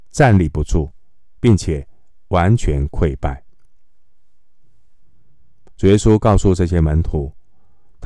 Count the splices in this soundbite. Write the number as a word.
one